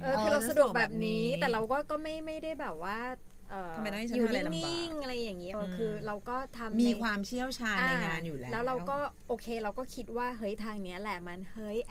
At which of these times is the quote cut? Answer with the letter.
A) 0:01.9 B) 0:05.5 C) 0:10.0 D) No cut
B